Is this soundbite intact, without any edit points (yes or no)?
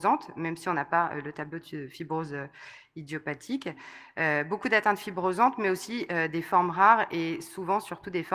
yes